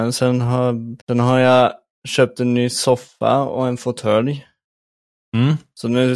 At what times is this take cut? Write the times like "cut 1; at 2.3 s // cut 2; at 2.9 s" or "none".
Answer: cut 1; at 1.0 s